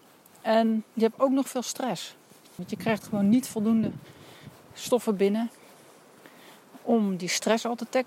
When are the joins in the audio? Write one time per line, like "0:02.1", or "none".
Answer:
0:02.6